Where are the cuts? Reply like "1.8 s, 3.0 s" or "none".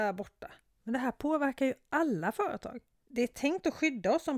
3.0 s

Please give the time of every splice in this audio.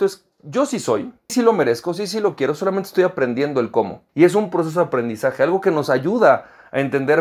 1.3 s, 4.1 s

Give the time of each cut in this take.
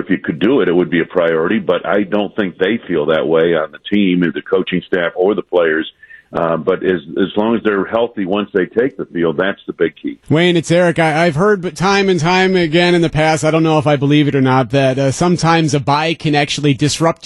10.2 s

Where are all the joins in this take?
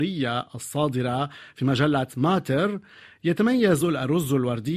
none

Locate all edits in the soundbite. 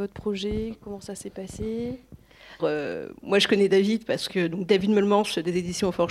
2.6 s

